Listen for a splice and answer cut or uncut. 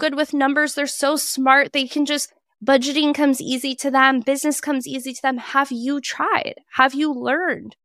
uncut